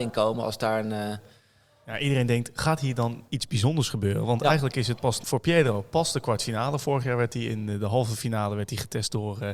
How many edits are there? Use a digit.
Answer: 0